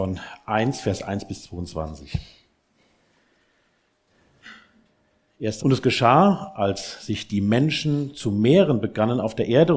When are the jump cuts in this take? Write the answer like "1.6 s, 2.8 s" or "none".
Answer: 5.6 s

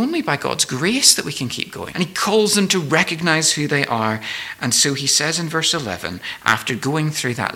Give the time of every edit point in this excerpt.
1.9 s

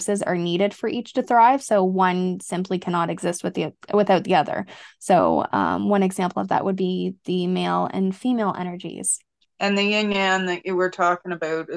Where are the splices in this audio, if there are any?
9.4 s

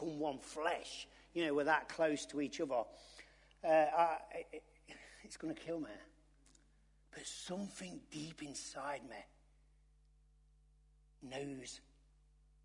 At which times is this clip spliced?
none

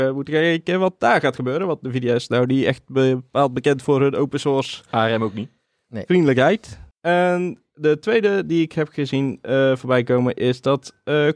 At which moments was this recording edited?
6.9 s

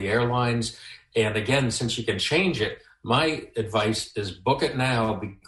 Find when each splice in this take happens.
none

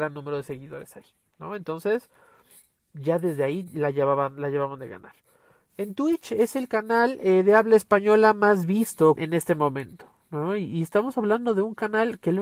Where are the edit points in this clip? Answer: 9.2 s

